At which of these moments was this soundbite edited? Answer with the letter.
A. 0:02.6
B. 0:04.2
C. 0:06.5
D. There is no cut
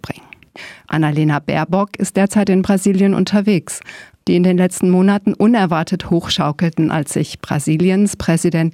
B